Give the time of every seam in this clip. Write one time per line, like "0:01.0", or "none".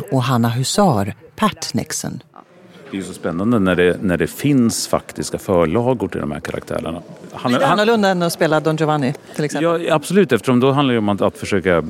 none